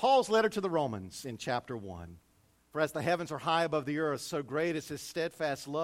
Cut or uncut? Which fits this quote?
cut